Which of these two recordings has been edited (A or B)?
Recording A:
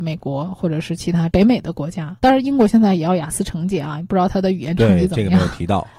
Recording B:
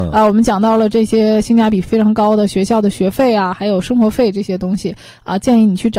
A